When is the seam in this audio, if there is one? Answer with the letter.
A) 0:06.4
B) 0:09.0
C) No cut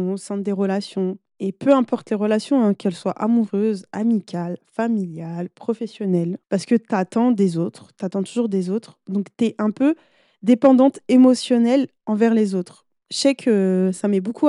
A